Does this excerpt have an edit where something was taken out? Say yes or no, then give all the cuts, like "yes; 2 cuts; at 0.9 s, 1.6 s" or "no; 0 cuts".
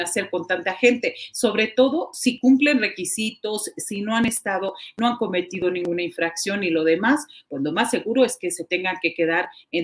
no; 0 cuts